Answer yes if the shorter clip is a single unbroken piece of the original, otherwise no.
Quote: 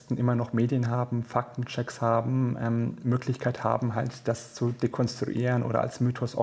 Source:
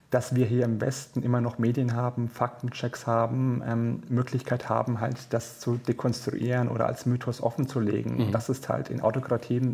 yes